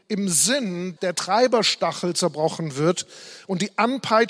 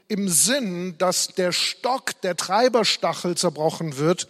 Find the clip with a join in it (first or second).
first